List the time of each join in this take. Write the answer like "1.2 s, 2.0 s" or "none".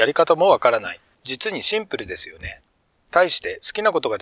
1.1 s